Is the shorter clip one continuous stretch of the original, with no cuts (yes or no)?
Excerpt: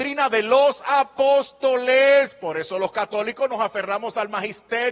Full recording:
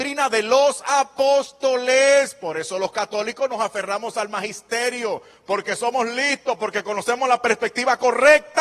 yes